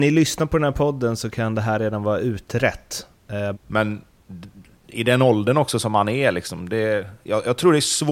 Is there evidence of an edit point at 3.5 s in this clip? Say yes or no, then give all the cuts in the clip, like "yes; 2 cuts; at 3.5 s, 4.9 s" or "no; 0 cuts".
yes; 1 cut; at 3.5 s